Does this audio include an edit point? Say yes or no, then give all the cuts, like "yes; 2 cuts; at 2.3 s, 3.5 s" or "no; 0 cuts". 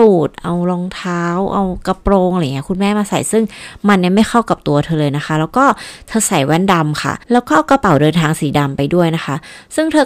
yes; 1 cut; at 7.2 s